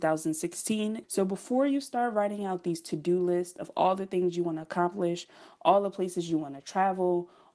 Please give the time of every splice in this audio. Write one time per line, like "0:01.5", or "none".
0:01.0